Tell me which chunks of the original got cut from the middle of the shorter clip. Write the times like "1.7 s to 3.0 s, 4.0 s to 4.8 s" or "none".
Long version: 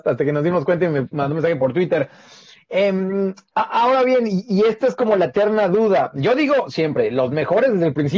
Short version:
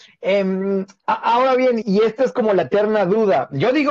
4.3 s to 4.4 s